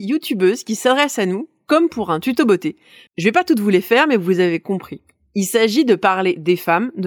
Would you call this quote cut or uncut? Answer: cut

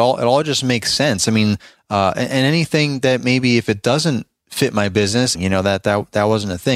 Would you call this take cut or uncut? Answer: cut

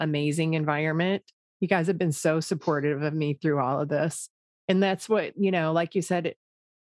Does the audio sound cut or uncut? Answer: cut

